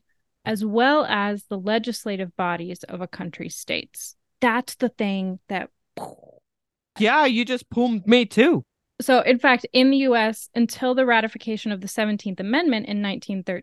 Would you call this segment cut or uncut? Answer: uncut